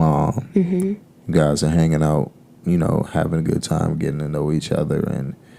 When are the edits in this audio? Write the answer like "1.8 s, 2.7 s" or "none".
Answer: none